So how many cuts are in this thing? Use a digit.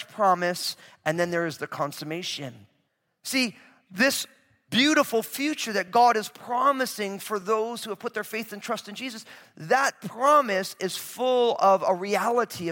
1